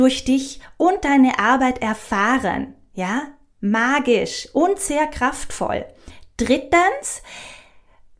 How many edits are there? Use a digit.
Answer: 0